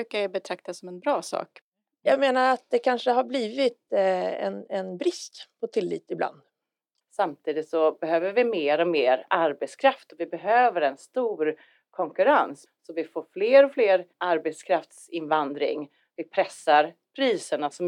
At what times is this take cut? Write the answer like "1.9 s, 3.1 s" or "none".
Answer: 7.0 s